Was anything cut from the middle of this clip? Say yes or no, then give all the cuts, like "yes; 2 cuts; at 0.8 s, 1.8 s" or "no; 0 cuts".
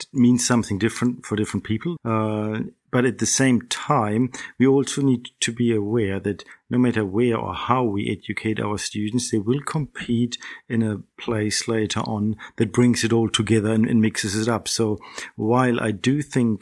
yes; 1 cut; at 2.0 s